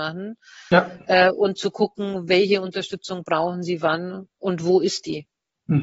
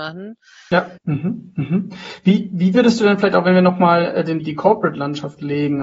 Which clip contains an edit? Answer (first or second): second